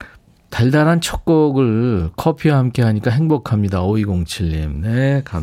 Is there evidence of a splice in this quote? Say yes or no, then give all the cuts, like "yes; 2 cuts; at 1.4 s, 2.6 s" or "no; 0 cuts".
no; 0 cuts